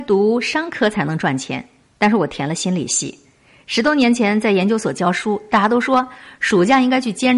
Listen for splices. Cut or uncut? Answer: uncut